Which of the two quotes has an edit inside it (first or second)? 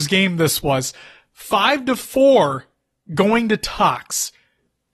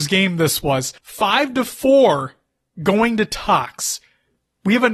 second